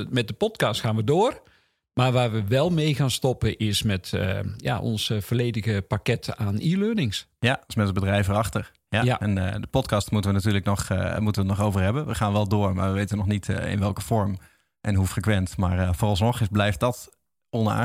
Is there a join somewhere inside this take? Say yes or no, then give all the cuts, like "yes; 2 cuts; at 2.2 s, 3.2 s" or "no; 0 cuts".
no; 0 cuts